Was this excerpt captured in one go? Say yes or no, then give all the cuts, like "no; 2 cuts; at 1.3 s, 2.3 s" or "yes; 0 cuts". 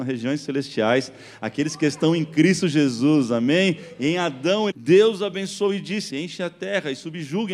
no; 2 cuts; at 4.7 s, 6.1 s